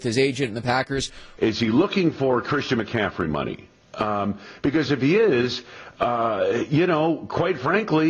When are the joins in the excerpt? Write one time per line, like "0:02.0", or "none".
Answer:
0:01.4